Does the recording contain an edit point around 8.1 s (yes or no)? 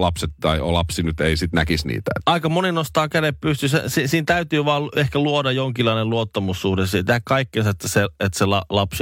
no